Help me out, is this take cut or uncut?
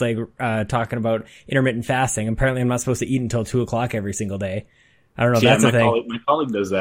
uncut